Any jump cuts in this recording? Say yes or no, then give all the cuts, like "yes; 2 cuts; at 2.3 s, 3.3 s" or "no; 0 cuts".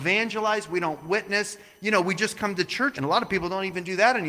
yes; 1 cut; at 2.9 s